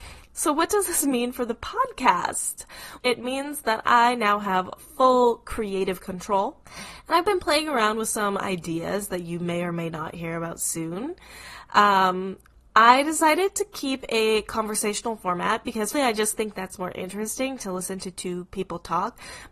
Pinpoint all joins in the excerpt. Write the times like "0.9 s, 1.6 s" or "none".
3.0 s, 15.9 s